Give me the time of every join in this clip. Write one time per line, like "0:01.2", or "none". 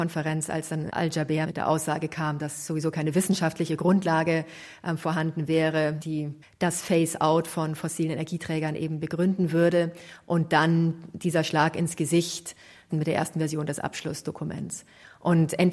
none